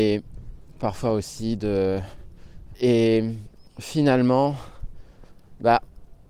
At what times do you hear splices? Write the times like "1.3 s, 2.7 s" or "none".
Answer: 2.7 s